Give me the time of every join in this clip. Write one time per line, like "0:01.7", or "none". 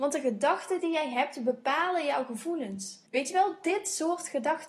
0:03.1